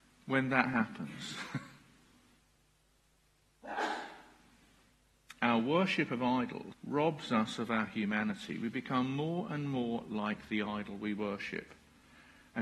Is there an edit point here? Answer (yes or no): yes